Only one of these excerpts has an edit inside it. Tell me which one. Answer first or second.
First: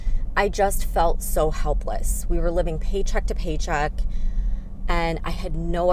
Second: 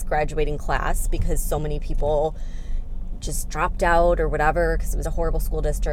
second